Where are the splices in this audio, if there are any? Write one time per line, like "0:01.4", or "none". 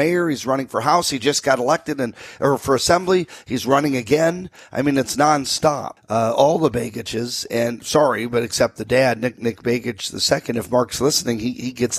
0:06.0